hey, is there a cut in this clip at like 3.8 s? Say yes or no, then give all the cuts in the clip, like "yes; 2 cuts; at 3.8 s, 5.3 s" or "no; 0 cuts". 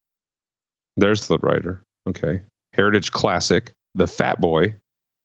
yes; 1 cut; at 3.8 s